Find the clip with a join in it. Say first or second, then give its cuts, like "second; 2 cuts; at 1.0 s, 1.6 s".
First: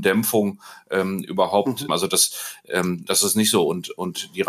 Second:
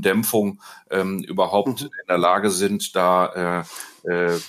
first; 2 cuts; at 1.9 s, 3.1 s